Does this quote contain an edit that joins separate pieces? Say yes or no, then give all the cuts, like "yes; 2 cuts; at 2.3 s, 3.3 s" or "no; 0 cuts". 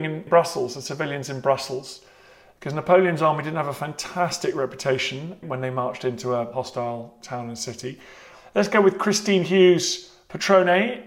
no; 0 cuts